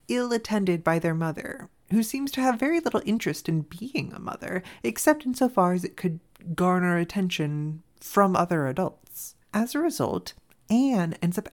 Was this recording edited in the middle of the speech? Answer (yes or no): yes